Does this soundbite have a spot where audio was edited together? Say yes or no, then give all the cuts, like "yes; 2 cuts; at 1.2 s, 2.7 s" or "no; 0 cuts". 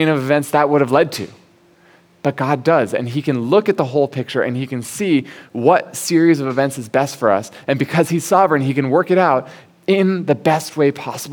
no; 0 cuts